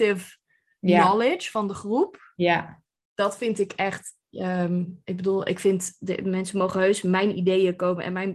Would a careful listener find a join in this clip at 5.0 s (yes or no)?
no